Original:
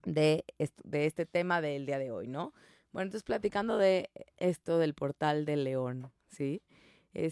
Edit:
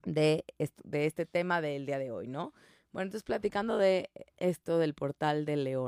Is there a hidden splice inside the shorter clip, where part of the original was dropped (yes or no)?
no